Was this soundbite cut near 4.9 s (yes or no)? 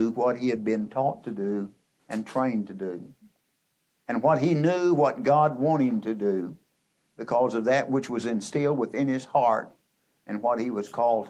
no